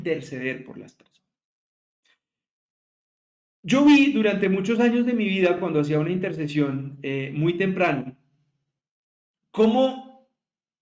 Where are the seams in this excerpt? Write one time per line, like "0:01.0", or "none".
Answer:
none